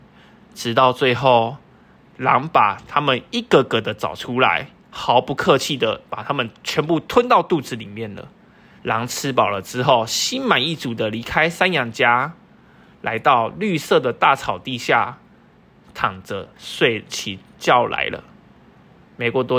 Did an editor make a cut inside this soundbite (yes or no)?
yes